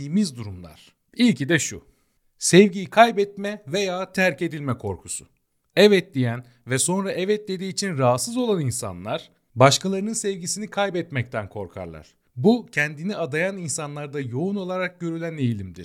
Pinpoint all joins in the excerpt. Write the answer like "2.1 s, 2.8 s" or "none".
none